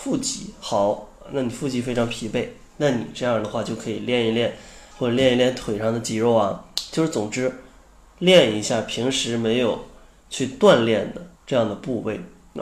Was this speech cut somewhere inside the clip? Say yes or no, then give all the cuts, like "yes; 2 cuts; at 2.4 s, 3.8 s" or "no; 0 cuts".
yes; 2 cuts; at 4.9 s, 11.4 s